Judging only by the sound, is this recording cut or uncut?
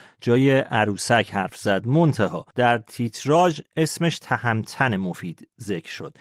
cut